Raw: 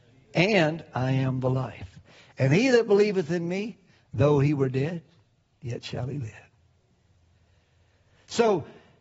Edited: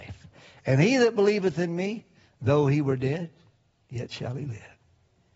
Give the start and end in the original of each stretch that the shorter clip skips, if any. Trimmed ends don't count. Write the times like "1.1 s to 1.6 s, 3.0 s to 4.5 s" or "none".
none